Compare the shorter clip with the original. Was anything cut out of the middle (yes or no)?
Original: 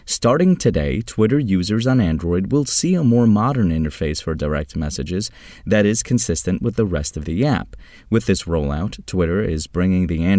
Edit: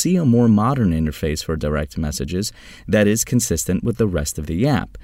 no